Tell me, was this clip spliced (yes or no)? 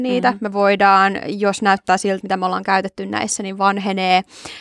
yes